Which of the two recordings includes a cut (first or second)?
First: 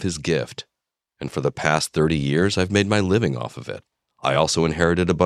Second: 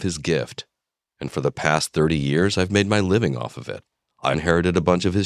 second